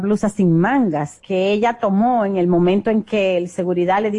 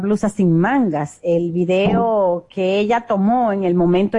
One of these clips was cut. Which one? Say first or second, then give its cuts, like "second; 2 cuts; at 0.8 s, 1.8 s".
first; 1 cut; at 1.2 s